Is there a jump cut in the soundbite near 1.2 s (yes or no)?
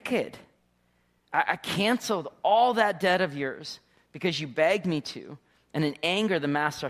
no